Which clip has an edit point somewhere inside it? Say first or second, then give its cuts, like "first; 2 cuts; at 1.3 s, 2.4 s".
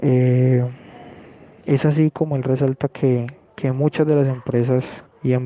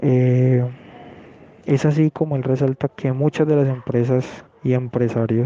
second; 1 cut; at 2.9 s